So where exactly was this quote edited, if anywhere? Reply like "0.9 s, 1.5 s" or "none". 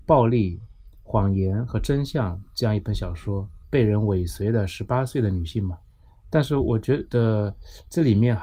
3.6 s